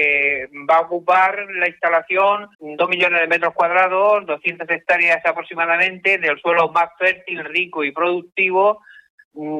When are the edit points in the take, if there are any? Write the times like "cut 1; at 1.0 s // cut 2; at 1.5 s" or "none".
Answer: cut 1; at 2.5 s

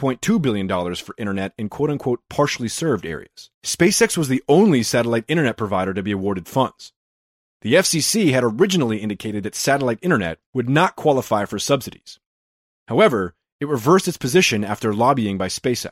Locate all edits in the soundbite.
cut 1; at 3.5 s // cut 2; at 10.5 s

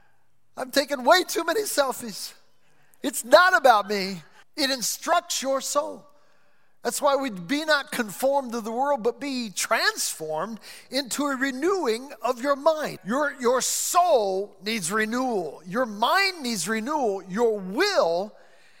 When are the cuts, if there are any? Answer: cut 1; at 4.4 s // cut 2; at 13.0 s

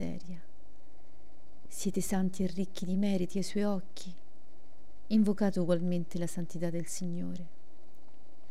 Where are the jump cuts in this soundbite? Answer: cut 1; at 1.7 s

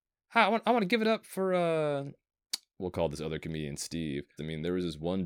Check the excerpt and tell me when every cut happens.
cut 1; at 4.4 s

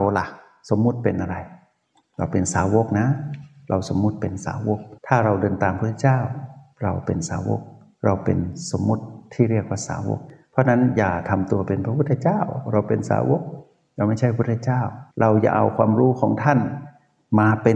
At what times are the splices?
cut 1; at 5.0 s // cut 2; at 15.1 s

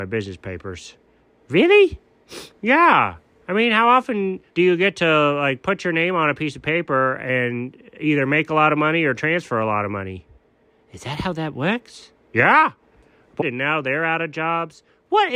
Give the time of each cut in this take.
cut 1; at 4.5 s // cut 2; at 13.4 s

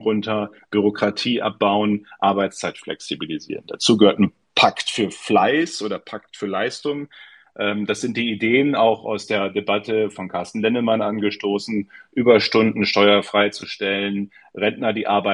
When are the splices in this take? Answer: none

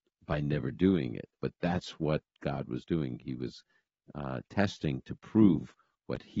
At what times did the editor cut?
cut 1; at 1.4 s

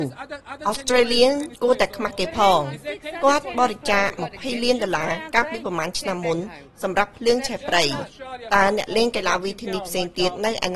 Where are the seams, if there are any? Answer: none

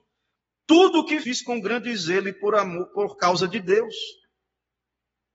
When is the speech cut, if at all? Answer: cut 1; at 1.2 s

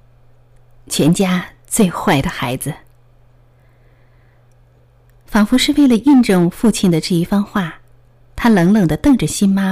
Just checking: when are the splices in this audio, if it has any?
none

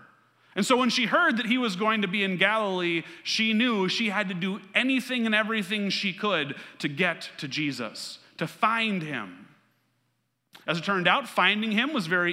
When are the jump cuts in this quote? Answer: none

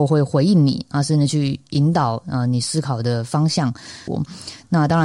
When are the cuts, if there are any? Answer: cut 1; at 4.1 s

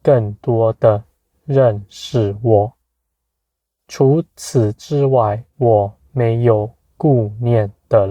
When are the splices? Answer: cut 1; at 5.5 s

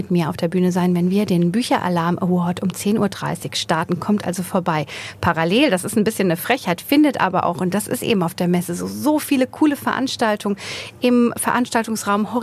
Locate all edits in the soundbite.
none

